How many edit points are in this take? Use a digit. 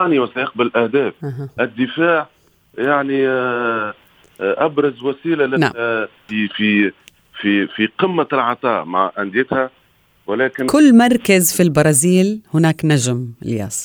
2